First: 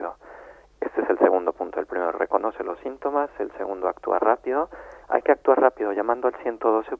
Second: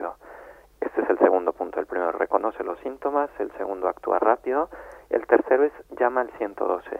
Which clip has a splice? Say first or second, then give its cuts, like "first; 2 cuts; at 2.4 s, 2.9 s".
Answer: first; 1 cut; at 5.0 s